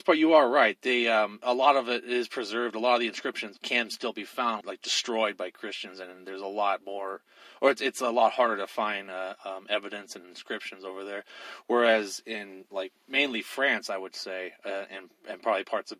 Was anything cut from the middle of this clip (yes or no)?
yes